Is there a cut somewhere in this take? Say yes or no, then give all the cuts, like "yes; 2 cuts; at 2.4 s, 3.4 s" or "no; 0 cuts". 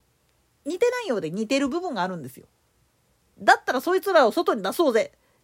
no; 0 cuts